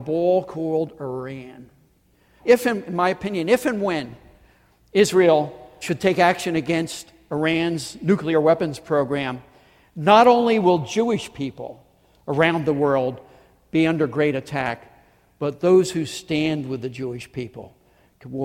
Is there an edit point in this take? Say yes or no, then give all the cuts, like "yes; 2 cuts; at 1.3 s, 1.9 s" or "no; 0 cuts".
yes; 2 cuts; at 2.4 s, 5.8 s